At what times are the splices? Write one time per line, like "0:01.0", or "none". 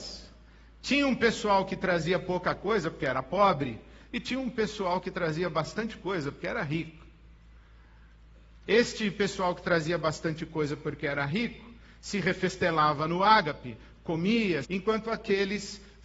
0:14.6